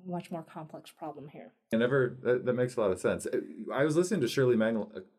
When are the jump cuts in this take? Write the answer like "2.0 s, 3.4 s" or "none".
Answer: 1.7 s